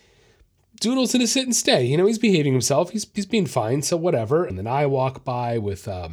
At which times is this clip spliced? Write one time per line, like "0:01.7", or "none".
0:04.5